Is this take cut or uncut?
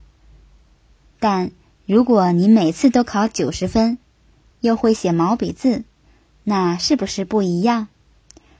cut